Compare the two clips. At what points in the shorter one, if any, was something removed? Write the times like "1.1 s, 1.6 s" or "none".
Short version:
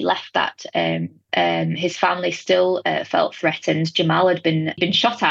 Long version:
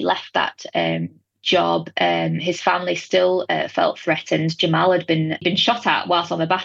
1.3 s

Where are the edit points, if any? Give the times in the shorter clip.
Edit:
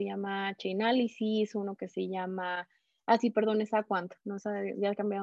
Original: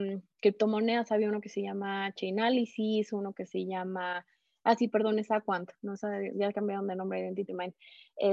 none

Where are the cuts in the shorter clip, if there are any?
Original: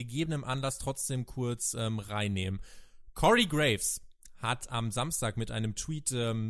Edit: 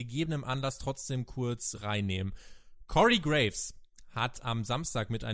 1.7 s

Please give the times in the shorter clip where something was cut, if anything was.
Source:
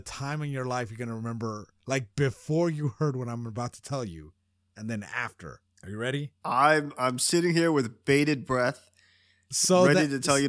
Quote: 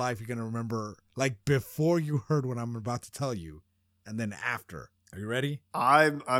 none

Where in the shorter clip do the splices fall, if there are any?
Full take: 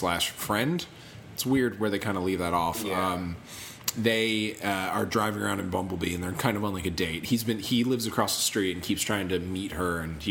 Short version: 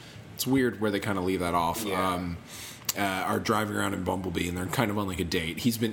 2.9 s

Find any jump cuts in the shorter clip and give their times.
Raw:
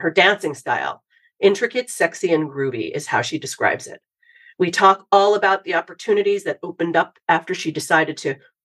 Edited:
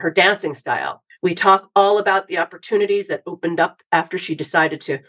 1.1 s

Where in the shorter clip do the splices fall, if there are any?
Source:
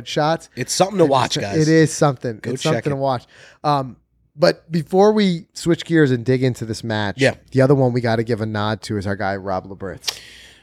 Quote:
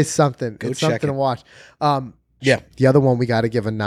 2.4 s

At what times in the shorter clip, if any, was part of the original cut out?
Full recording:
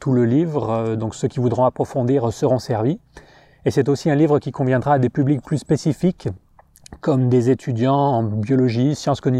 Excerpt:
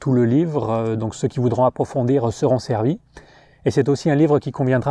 none

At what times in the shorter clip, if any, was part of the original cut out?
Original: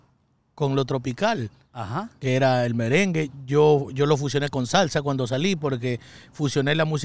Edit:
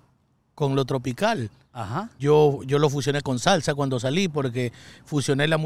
2.2 s

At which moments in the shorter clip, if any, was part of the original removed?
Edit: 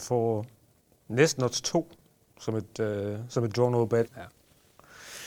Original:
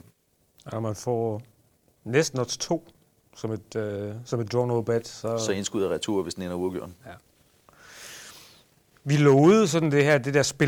4.1 s

